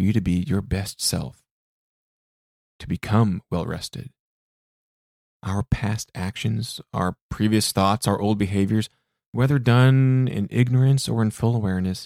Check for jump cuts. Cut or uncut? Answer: cut